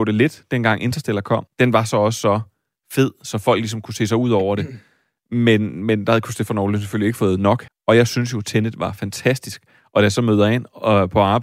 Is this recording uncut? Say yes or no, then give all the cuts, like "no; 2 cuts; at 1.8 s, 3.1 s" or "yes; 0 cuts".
no; 2 cuts; at 1.5 s, 7.7 s